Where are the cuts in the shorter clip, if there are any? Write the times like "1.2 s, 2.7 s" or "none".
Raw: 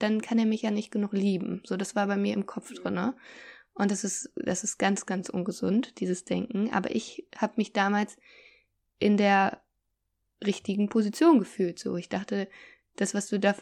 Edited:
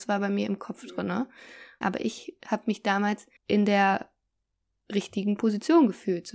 1.8 s, 3.4 s